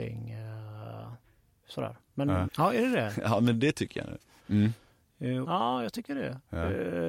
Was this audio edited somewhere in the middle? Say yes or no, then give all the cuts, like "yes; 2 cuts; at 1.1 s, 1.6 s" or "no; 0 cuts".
yes; 3 cuts; at 2.5 s, 4.4 s, 5.4 s